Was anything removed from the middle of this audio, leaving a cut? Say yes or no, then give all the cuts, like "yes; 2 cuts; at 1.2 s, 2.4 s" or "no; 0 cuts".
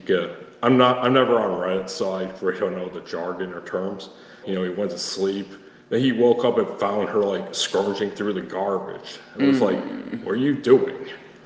yes; 1 cut; at 4.4 s